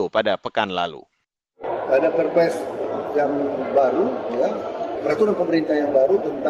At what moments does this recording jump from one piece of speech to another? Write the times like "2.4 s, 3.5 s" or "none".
none